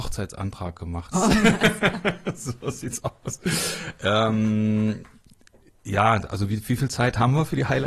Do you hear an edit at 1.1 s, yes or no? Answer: yes